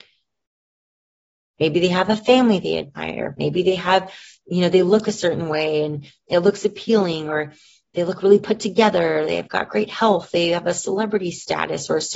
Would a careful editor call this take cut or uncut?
cut